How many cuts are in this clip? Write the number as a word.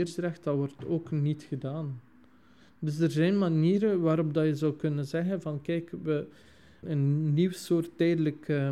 one